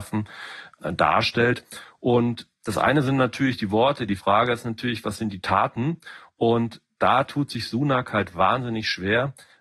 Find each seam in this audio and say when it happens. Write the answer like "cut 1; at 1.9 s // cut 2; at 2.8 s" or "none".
none